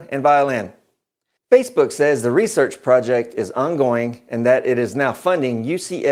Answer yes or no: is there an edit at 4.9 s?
no